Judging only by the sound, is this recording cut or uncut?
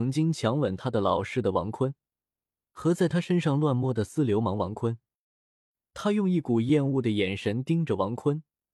uncut